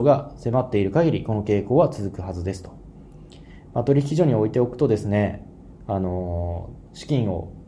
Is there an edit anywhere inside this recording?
no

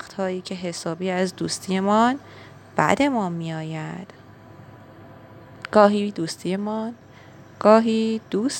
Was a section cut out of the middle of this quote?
no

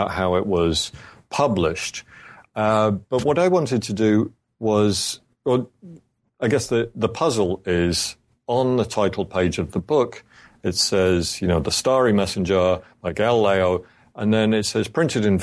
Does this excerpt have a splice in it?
no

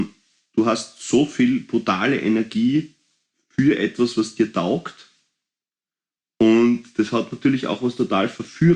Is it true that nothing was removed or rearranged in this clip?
yes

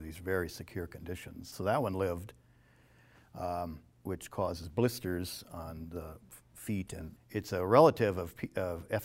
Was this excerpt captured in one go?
no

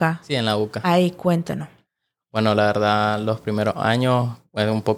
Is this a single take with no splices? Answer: yes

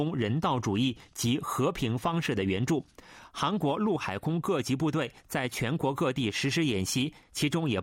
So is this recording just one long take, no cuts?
no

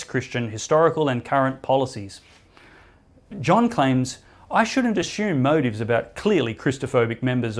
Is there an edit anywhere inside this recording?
no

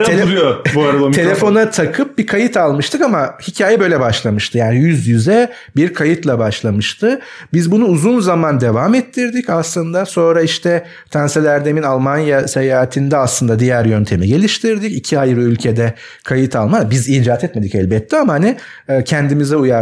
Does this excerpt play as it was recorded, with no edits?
yes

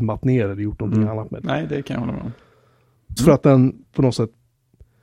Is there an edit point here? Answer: yes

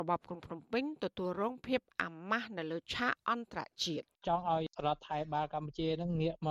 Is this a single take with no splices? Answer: no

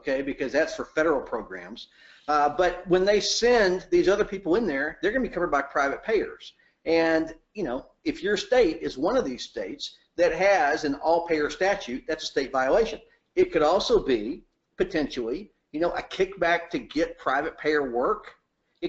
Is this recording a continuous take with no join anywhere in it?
yes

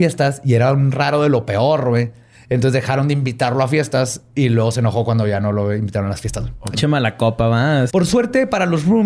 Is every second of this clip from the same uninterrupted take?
no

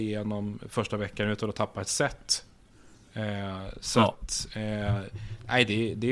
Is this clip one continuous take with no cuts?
yes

